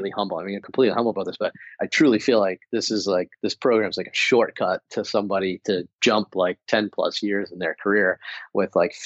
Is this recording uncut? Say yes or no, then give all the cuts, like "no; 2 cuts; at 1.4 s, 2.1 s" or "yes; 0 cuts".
yes; 0 cuts